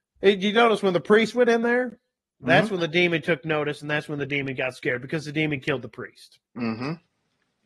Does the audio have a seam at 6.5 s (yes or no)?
yes